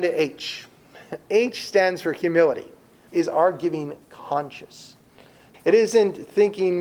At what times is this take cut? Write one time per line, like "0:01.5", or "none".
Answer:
0:03.1
0:05.5